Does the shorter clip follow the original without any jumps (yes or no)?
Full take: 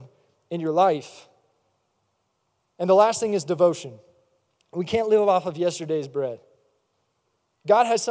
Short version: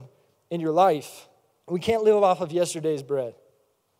no